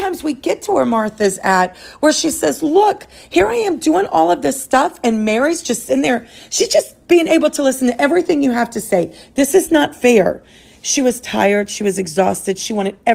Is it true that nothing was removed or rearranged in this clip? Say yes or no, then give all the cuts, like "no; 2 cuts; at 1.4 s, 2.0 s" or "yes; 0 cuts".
yes; 0 cuts